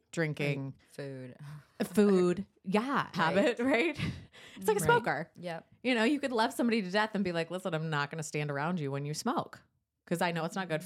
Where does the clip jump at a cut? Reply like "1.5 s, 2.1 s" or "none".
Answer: 3.1 s